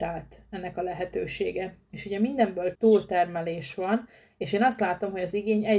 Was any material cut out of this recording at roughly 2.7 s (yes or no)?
yes